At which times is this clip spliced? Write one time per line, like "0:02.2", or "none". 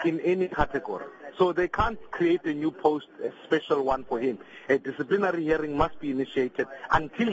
none